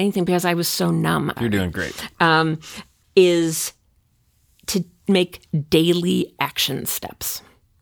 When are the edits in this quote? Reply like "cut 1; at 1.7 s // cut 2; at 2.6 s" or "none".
cut 1; at 1.4 s // cut 2; at 3.0 s